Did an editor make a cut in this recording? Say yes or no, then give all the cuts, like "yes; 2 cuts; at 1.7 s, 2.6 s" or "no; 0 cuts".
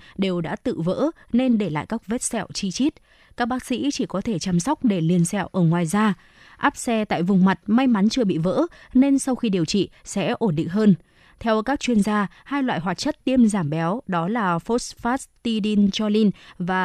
no; 0 cuts